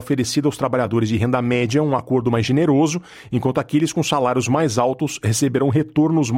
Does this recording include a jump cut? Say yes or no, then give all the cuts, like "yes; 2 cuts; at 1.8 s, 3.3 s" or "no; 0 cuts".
no; 0 cuts